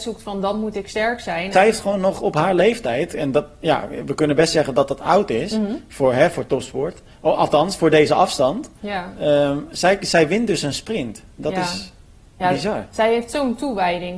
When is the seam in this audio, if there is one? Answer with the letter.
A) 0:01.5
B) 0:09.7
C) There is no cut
A